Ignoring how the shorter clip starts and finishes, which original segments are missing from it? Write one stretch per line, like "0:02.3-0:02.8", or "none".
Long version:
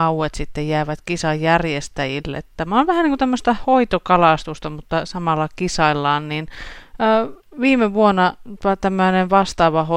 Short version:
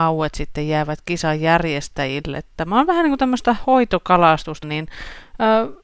0:04.6-0:06.2